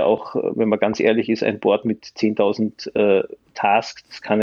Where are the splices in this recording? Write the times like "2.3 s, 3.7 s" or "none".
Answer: none